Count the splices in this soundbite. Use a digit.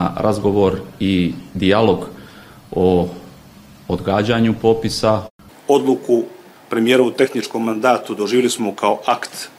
1